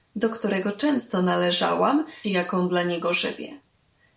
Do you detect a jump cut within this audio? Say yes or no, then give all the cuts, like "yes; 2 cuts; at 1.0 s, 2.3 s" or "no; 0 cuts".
yes; 1 cut; at 2.2 s